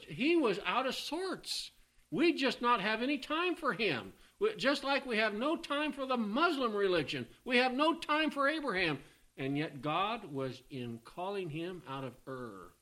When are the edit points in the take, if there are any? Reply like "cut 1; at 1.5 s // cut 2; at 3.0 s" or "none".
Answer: cut 1; at 10.7 s